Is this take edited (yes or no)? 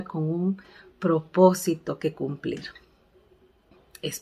no